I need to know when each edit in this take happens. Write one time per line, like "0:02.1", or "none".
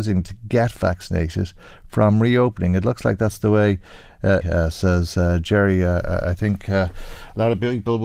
0:04.4